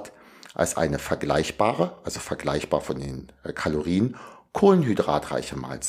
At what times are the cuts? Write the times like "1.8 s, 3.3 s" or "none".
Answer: none